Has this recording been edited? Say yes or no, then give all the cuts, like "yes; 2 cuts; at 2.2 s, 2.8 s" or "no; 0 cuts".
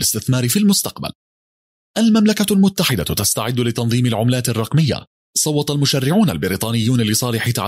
no; 0 cuts